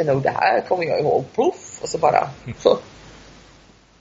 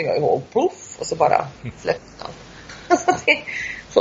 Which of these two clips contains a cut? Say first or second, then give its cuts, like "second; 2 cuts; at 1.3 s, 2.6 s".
first; 1 cut; at 2.6 s